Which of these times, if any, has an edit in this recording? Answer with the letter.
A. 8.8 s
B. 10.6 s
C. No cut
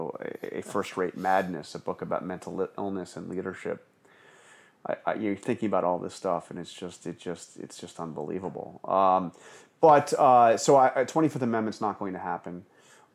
C